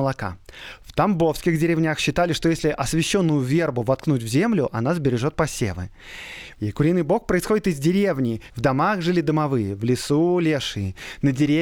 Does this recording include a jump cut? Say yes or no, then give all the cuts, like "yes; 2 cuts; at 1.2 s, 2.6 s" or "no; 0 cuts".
yes; 2 cuts; at 6.5 s, 8.5 s